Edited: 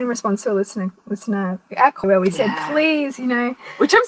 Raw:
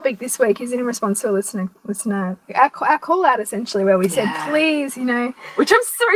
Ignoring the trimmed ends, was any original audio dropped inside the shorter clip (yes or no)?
yes